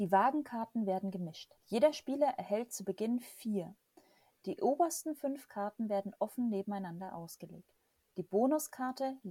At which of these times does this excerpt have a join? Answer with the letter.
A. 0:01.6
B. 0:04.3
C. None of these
B